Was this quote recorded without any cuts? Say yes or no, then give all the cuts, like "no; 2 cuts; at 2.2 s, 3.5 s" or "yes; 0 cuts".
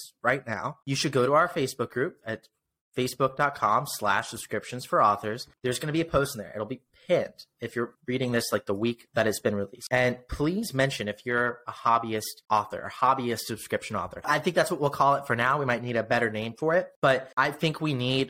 yes; 0 cuts